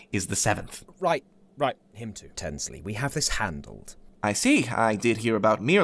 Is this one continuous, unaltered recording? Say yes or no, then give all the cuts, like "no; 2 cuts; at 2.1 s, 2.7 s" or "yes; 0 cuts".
no; 2 cuts; at 2.3 s, 4.1 s